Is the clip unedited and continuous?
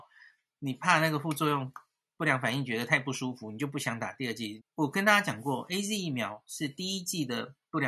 no; 1 cut; at 4.6 s

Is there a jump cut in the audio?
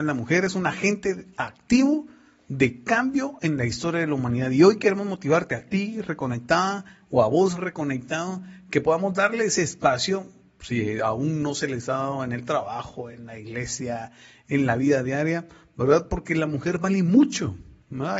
no; 0 cuts

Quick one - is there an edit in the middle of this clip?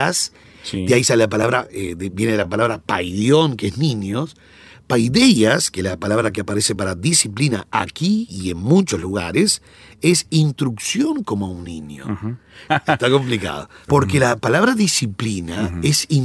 yes; 2 cuts; at 12.7 s, 13.9 s

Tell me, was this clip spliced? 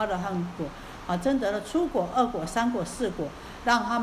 no; 0 cuts

